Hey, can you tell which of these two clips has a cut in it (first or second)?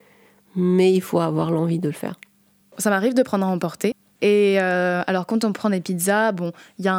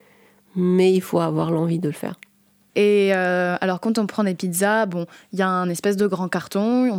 second